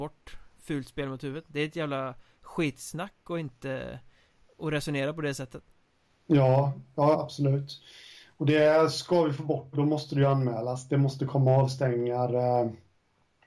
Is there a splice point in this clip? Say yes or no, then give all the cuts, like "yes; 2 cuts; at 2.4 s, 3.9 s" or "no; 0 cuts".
yes; 2 cuts; at 7.1 s, 9.7 s